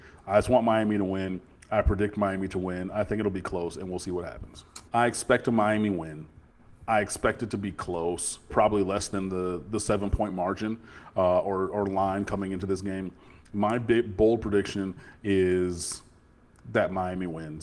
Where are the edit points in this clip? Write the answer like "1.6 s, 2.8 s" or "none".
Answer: 4.9 s, 8.5 s